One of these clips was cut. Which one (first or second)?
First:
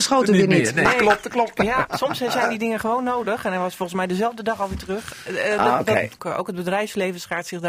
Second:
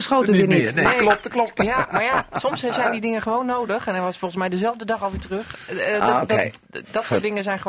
first